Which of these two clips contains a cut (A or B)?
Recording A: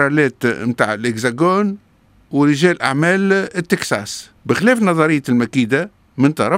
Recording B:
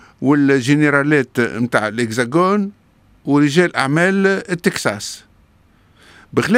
A